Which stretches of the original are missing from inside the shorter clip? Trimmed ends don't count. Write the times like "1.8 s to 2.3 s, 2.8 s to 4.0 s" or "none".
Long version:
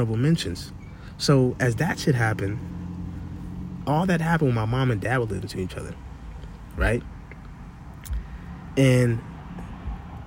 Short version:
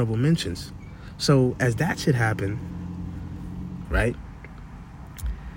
3.8 s to 6.7 s